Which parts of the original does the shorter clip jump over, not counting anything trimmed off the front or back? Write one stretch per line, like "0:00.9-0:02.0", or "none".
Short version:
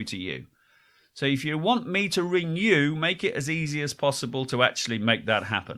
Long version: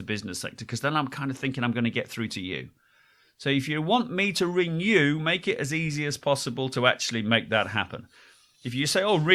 none